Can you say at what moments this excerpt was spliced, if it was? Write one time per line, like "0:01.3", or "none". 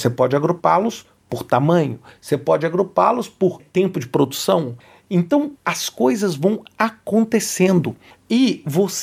0:05.6